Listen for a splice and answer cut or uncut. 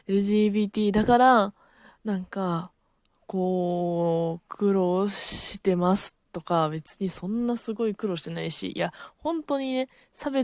uncut